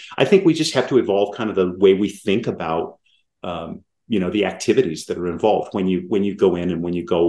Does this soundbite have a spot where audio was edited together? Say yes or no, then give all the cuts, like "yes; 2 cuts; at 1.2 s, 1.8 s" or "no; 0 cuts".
no; 0 cuts